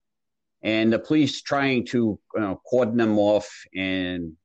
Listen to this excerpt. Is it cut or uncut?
uncut